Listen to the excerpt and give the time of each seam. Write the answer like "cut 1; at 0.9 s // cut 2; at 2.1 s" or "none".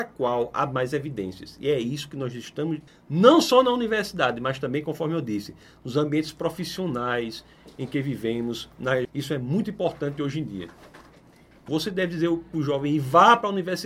cut 1; at 2.9 s // cut 2; at 9.0 s // cut 3; at 11.7 s